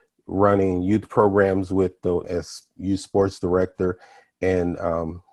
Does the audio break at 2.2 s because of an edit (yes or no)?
yes